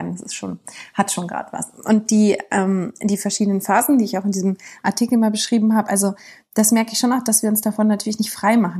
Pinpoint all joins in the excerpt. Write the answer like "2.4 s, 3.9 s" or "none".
none